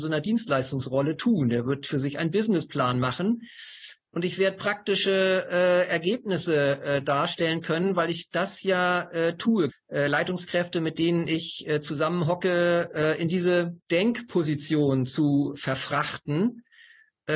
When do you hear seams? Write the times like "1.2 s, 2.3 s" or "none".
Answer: 4.1 s, 9.7 s, 13.8 s